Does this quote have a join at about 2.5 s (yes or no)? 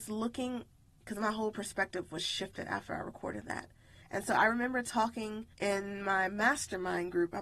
no